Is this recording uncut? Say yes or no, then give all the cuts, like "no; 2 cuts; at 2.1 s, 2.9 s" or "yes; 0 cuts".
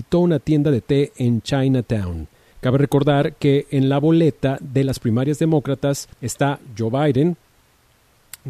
no; 2 cuts; at 2.5 s, 6.1 s